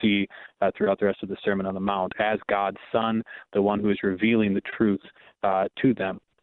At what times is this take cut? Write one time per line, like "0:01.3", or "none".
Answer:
none